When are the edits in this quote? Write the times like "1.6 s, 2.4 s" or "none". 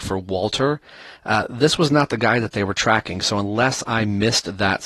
none

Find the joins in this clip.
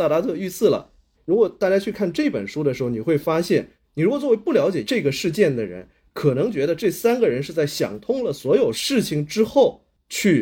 1.1 s

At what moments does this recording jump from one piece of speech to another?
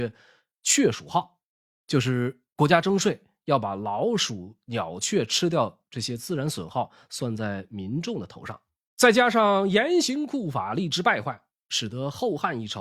8.9 s

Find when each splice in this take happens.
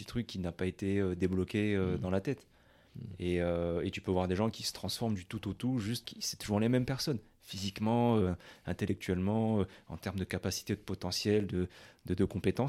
6.0 s

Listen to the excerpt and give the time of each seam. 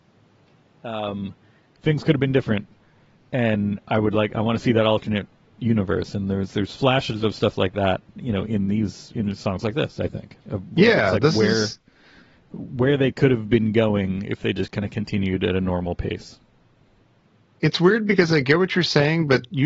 10.4 s

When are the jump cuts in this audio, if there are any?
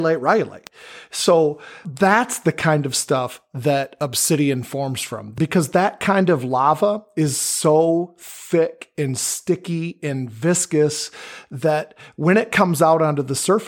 none

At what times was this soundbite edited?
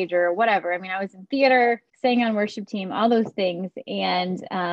1.9 s

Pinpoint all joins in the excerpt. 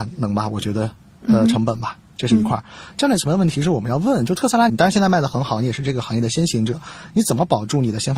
2.9 s, 4.7 s

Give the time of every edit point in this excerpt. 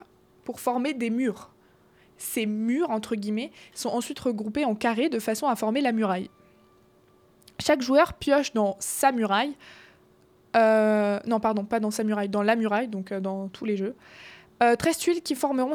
none

